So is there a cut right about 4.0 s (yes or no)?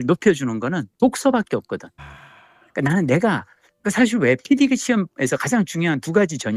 no